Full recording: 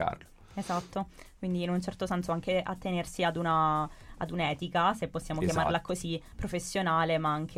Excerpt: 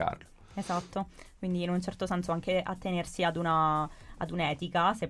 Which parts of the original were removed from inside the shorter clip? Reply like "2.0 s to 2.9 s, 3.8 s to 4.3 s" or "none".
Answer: none